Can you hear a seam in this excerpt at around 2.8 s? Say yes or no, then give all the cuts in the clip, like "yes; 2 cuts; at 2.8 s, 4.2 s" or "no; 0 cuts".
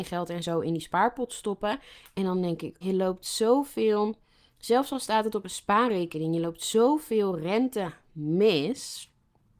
yes; 1 cut; at 2.8 s